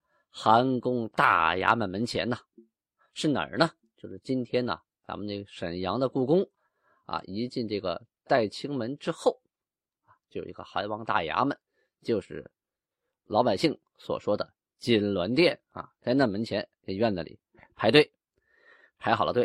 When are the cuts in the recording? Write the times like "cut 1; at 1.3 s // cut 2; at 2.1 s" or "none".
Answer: none